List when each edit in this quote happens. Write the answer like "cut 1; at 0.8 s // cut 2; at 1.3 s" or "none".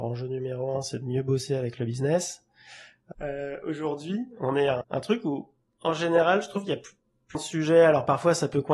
cut 1; at 3.1 s // cut 2; at 4.8 s // cut 3; at 7.3 s